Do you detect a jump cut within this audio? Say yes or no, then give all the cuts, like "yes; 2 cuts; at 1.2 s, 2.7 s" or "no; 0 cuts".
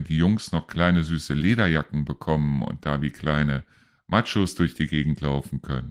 no; 0 cuts